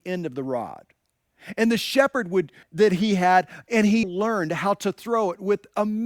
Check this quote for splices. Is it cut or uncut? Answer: cut